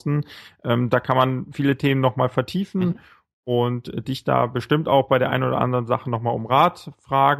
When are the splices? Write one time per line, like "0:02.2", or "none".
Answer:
none